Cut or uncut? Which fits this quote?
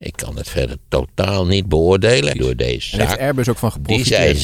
cut